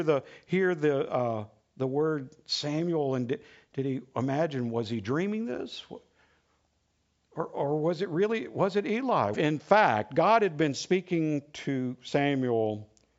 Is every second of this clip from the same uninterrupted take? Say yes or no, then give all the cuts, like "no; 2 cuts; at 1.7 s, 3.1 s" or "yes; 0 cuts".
no; 1 cut; at 9.3 s